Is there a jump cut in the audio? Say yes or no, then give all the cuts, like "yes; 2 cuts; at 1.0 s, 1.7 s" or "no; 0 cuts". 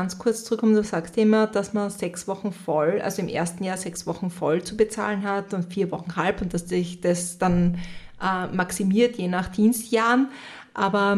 no; 0 cuts